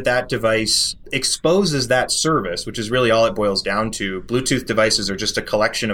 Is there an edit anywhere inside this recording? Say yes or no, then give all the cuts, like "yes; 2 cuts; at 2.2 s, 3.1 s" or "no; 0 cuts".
yes; 1 cut; at 1.0 s